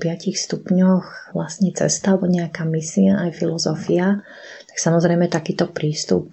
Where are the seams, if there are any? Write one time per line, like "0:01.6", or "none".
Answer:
none